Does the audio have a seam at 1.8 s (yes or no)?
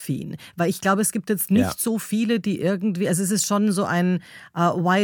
no